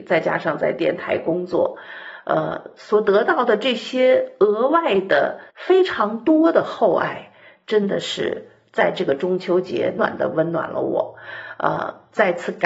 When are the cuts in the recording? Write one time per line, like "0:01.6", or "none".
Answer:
0:05.5
0:10.0